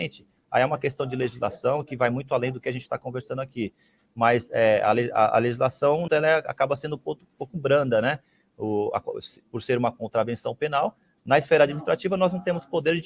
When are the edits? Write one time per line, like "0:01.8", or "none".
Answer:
0:06.1